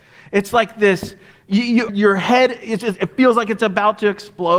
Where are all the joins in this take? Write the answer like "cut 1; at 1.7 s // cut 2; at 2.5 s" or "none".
cut 1; at 1.9 s